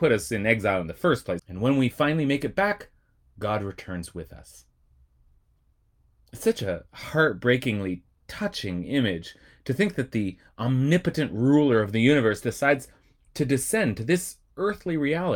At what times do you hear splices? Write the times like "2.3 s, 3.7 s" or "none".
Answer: 1.4 s